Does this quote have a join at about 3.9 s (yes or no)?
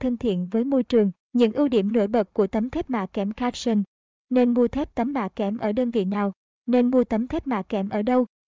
no